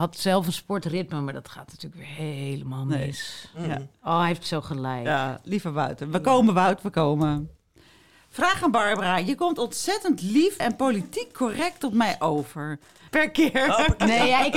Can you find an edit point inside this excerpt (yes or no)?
yes